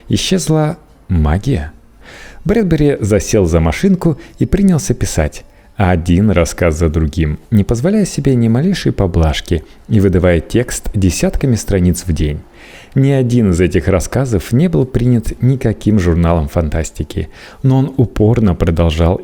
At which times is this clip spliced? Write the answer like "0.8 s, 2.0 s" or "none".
none